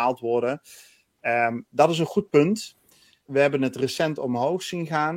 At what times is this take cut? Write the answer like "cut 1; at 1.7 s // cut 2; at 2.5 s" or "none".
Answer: cut 1; at 3.3 s